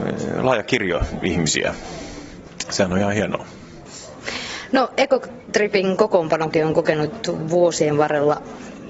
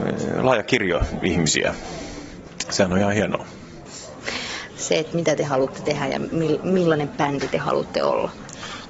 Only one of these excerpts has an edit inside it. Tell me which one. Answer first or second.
second